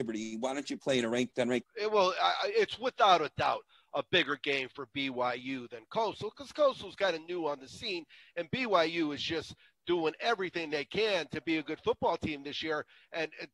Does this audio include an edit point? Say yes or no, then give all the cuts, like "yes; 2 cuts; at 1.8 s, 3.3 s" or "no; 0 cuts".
yes; 1 cut; at 1.6 s